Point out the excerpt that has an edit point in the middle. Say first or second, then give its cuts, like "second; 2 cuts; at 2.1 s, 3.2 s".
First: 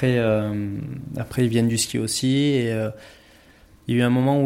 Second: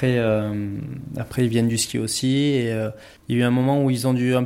second; 1 cut; at 3.2 s